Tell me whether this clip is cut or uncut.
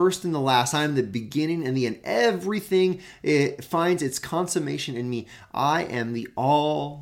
uncut